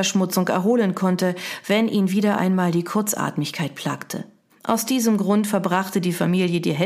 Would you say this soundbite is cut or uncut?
cut